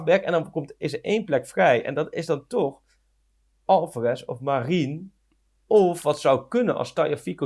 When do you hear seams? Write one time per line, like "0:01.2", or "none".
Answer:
none